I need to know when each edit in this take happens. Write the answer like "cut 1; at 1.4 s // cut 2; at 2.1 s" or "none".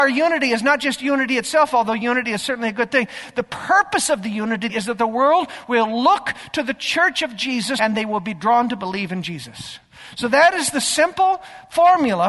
cut 1; at 4.7 s // cut 2; at 7.8 s

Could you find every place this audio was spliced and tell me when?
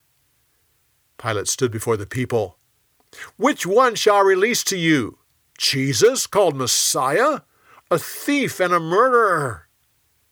cut 1; at 7.8 s

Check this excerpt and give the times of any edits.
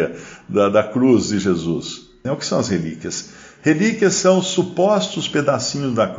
cut 1; at 2.2 s

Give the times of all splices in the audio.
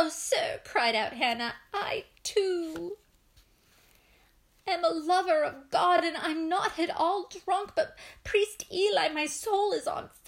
none

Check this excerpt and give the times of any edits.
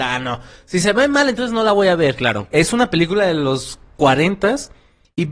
cut 1; at 2.5 s

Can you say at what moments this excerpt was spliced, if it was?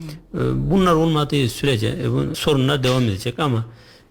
cut 1; at 2.3 s

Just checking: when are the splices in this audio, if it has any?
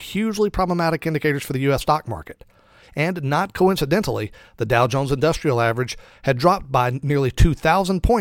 cut 1; at 1.8 s

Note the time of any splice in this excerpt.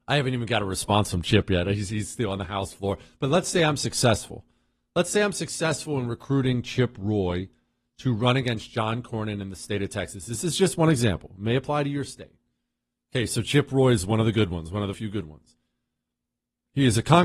cut 1; at 14.9 s

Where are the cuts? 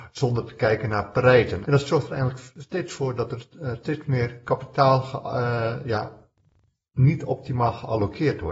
cut 1; at 1.6 s

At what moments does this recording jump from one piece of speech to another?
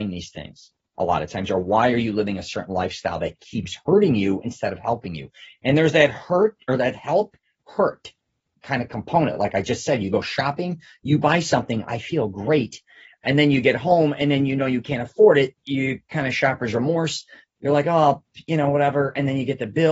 none

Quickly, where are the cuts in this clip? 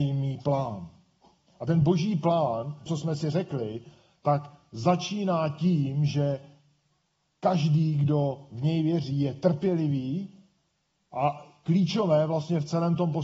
cut 1; at 2.9 s // cut 2; at 11.0 s

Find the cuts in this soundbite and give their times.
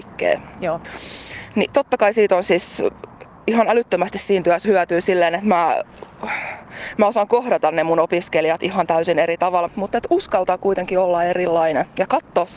cut 1; at 4.6 s // cut 2; at 9.7 s

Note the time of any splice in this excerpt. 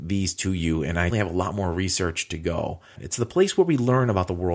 cut 1; at 1.1 s // cut 2; at 3.0 s

